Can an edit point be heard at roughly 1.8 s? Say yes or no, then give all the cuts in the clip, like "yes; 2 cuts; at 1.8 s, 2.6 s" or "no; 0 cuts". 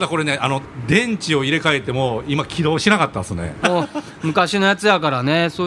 no; 1 cut; at 3.6 s